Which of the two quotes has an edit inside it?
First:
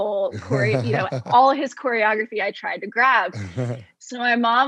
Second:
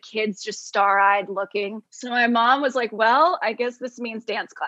second; 1 cut; at 1.8 s

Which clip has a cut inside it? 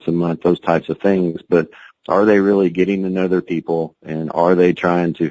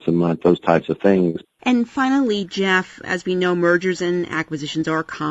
second; 1 cut; at 1.4 s

